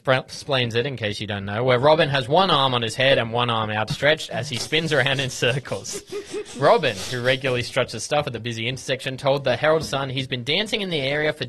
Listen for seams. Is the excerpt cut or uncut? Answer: uncut